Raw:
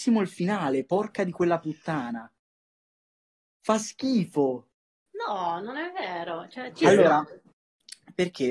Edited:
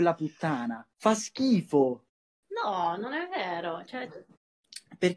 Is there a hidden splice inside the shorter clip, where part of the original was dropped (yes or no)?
yes